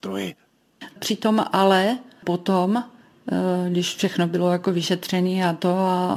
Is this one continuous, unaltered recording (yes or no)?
no